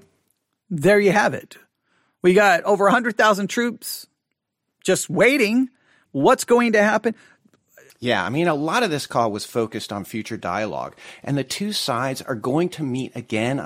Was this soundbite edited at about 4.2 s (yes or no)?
no